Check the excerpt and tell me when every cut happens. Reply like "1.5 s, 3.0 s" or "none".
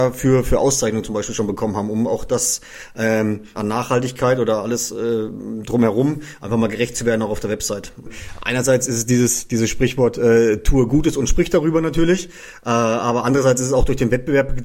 3.5 s